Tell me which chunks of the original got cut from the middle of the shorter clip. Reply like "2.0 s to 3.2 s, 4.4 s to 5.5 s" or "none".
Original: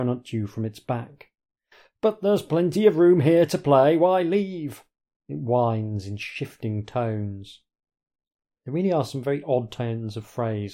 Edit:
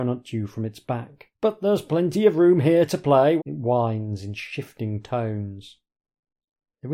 1.3 s to 1.9 s, 4.0 s to 5.2 s